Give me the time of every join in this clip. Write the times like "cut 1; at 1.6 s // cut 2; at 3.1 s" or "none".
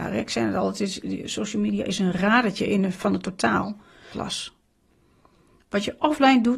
cut 1; at 4.1 s